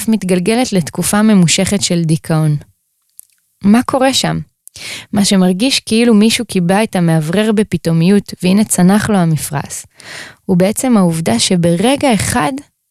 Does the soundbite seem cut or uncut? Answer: uncut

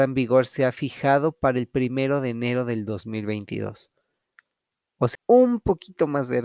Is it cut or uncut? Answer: cut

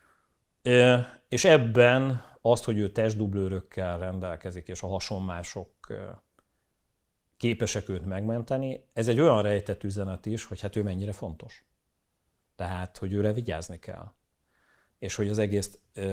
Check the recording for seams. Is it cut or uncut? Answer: uncut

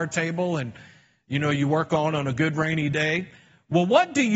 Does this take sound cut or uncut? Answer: uncut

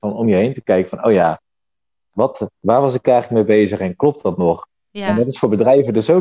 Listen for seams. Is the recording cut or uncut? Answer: cut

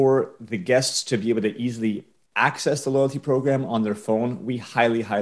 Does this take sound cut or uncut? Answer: uncut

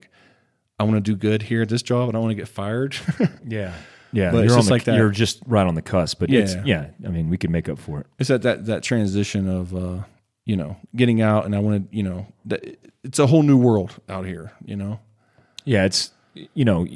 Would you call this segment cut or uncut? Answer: uncut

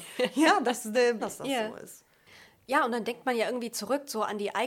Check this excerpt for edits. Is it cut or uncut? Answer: cut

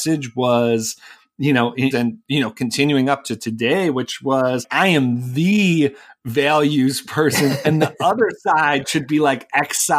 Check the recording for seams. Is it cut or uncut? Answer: cut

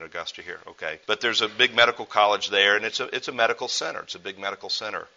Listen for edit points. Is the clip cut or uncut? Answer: cut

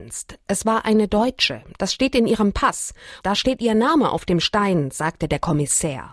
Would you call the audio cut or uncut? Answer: cut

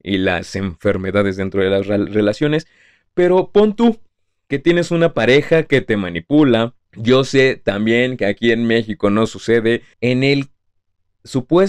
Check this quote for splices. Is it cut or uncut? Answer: cut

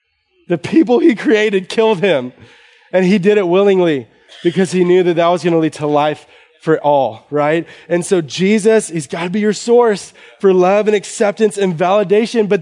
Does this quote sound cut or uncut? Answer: uncut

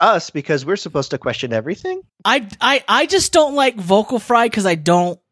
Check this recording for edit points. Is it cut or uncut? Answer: cut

